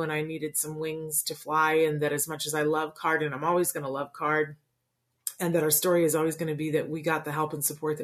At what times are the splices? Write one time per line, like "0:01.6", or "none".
none